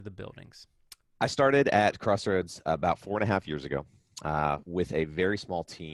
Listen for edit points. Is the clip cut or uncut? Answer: cut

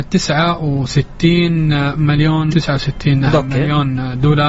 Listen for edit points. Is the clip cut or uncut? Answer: cut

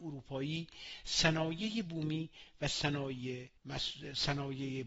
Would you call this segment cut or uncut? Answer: cut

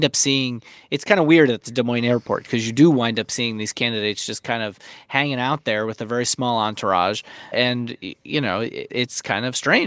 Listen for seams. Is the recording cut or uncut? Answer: cut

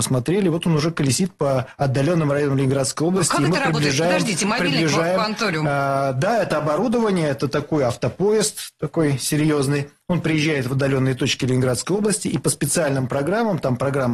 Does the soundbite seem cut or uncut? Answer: uncut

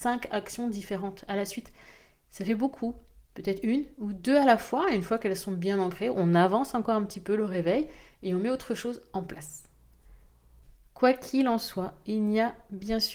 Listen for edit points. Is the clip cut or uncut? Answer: uncut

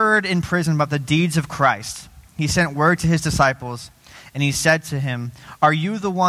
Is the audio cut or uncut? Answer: uncut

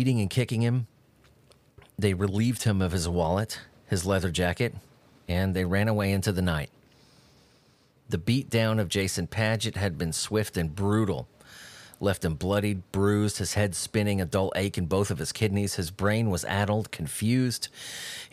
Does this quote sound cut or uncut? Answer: uncut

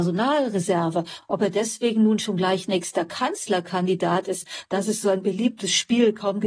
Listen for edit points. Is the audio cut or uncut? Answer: uncut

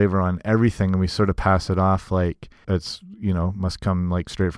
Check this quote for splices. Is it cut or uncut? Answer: cut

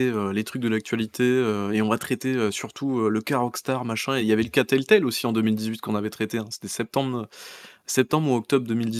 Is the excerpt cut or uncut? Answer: uncut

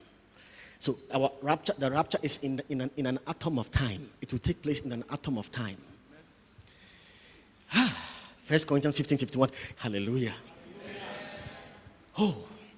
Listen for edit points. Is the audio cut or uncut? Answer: cut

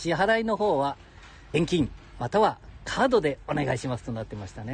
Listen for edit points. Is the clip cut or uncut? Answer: cut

